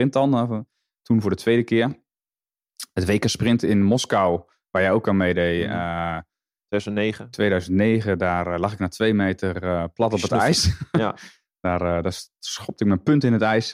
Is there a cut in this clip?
no; 0 cuts

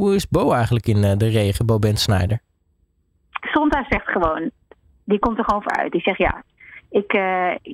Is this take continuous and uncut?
no; 1 cut; at 3.4 s

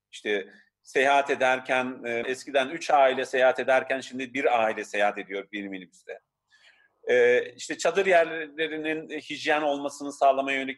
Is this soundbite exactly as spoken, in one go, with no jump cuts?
no; 1 cut; at 2.2 s

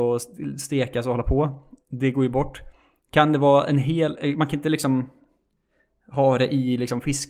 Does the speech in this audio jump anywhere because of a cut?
no; 0 cuts

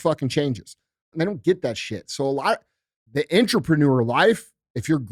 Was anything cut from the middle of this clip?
yes; 2 cuts; at 1.1 s, 3.1 s

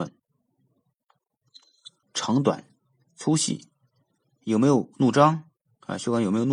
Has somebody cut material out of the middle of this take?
yes; 1 cut; at 2.0 s

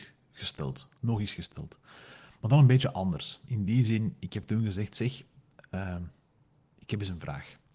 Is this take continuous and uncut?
yes; 0 cuts

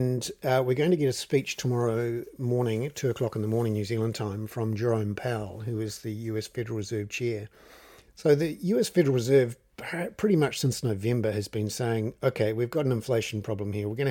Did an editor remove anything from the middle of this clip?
yes; 1 cut; at 8.0 s

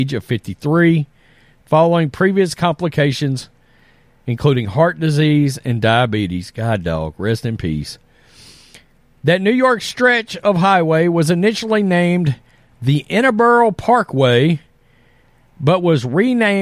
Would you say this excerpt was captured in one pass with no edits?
yes; 0 cuts

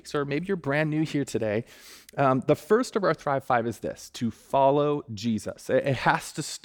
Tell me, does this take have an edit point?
no; 0 cuts

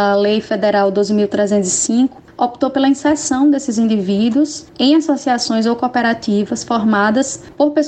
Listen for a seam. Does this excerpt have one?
no; 0 cuts

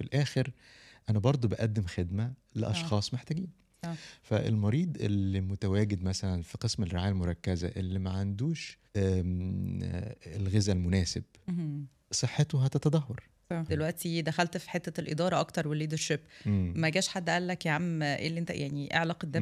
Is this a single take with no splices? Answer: no; 2 cuts; at 8.9 s, 13.7 s

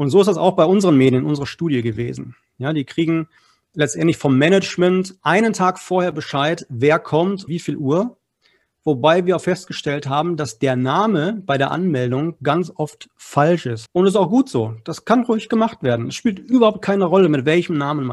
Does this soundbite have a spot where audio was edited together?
yes; 2 cuts; at 7.5 s, 13.9 s

